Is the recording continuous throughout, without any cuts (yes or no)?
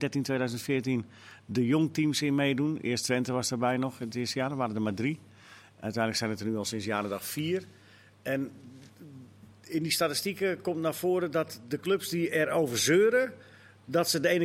yes